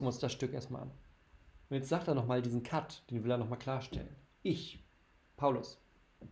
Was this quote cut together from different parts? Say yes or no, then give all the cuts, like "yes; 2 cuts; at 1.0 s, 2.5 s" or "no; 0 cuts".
yes; 1 cut; at 1.7 s